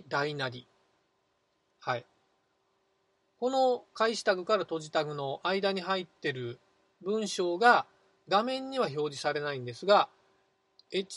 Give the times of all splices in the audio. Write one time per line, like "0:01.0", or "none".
none